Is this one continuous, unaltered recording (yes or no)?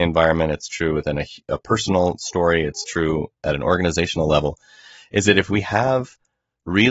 yes